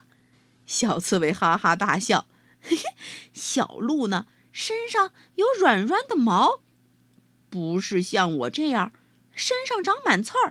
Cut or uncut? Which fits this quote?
uncut